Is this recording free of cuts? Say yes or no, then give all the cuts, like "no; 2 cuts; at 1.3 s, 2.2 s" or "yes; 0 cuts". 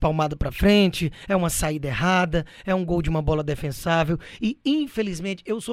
yes; 0 cuts